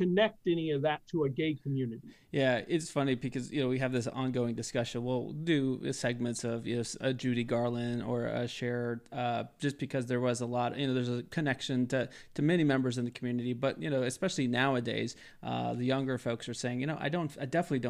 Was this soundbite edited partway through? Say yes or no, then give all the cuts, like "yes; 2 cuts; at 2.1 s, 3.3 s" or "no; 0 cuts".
no; 0 cuts